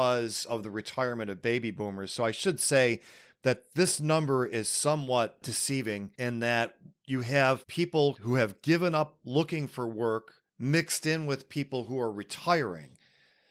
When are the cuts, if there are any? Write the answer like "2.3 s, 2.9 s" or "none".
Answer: 10.5 s

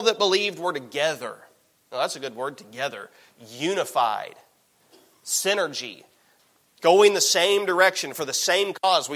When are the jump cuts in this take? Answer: none

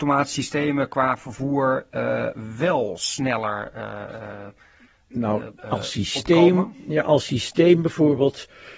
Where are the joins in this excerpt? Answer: 5.6 s

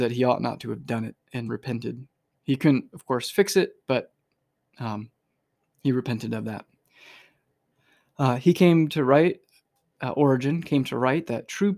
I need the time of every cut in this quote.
none

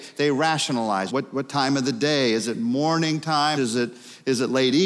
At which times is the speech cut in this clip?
1.1 s, 3.5 s

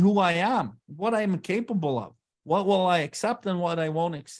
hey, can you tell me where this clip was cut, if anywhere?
none

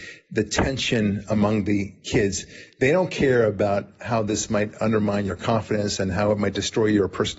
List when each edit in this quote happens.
none

